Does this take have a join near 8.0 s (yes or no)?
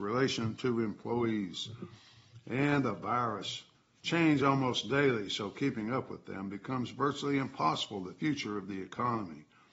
no